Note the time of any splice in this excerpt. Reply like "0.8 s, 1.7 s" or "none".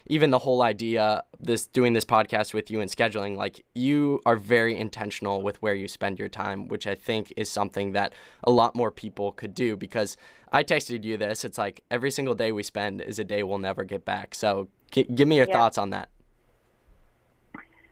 1.4 s